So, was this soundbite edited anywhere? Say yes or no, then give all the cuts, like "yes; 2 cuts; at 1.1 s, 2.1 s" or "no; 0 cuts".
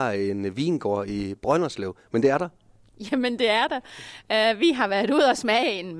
no; 0 cuts